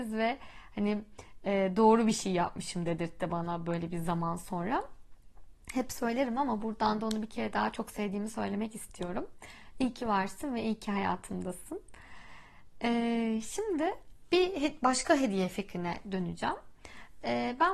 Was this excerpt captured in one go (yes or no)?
yes